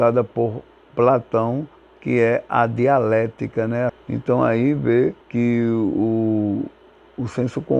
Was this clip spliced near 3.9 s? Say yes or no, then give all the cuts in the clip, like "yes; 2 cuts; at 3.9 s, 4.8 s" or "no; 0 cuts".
yes; 2 cuts; at 3.9 s, 5.2 s